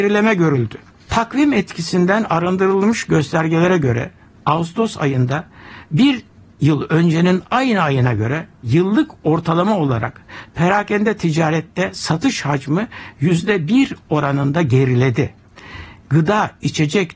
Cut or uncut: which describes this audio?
uncut